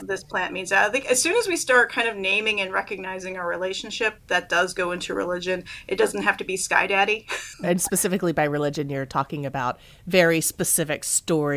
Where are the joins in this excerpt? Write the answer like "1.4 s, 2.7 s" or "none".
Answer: 7.5 s